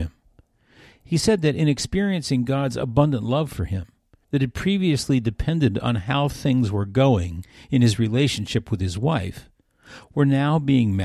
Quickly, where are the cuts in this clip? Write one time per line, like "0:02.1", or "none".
0:04.2